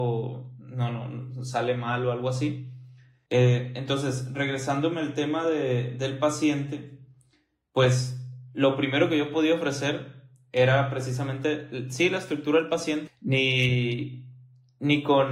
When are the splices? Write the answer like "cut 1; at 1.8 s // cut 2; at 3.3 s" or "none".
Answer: cut 1; at 3.3 s // cut 2; at 13.1 s